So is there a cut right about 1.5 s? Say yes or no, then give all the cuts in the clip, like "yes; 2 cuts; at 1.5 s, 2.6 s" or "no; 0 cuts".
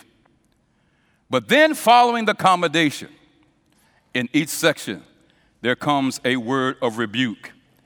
no; 0 cuts